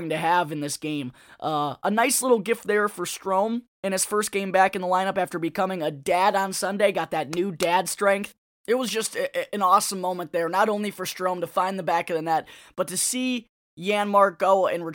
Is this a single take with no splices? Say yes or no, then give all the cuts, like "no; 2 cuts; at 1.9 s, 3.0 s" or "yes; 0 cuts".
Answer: yes; 0 cuts